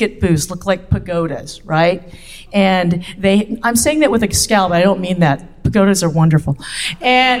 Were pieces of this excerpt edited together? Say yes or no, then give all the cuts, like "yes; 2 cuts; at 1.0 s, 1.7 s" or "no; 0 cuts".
no; 0 cuts